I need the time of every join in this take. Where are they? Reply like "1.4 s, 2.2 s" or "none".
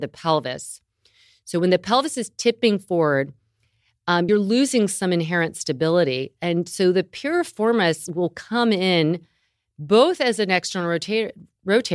4.3 s